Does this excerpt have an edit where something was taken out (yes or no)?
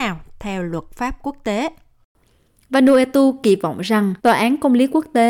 yes